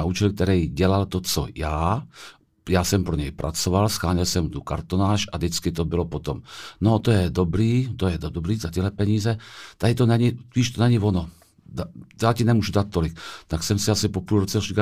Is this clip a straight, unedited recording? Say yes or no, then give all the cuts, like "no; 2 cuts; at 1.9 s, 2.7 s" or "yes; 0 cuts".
yes; 0 cuts